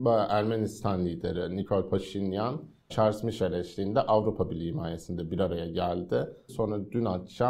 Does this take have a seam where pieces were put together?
yes; 2 cuts; at 2.9 s, 6.5 s

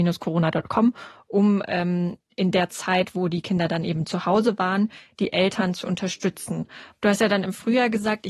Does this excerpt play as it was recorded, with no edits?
no; 1 cut; at 6.9 s

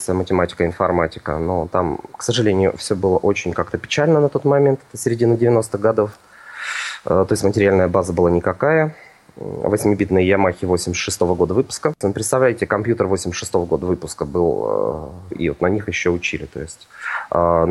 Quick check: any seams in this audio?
yes; 2 cuts; at 12.0 s, 15.3 s

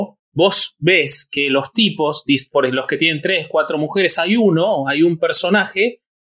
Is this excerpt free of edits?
yes; 0 cuts

